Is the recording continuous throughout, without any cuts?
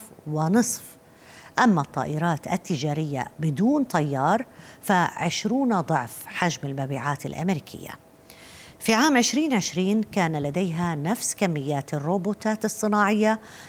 yes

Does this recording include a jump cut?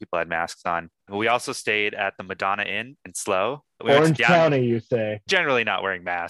yes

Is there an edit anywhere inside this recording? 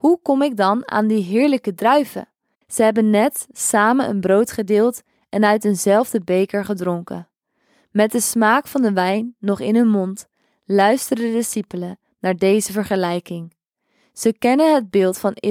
yes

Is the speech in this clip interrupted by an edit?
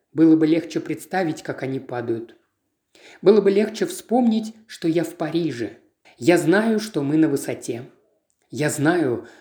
yes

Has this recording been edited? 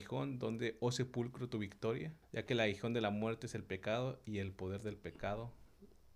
yes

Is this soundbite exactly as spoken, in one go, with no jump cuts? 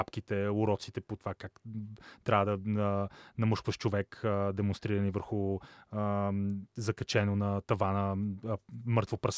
yes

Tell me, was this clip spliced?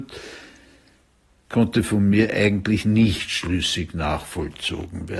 no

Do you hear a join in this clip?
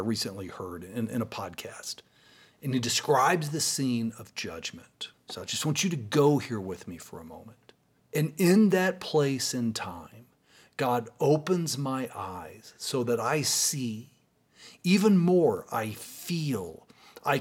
yes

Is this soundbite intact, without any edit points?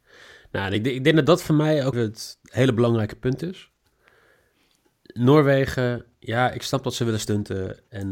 no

